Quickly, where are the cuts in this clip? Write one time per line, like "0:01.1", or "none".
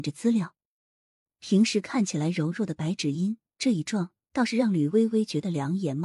0:01.3
0:03.5